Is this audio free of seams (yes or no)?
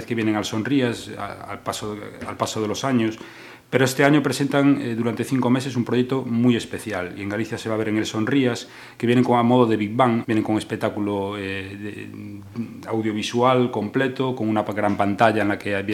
no